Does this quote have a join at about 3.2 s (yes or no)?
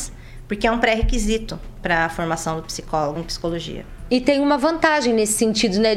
yes